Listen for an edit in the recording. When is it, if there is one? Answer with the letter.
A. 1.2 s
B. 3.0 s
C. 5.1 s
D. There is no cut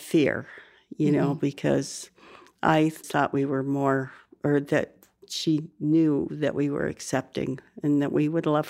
B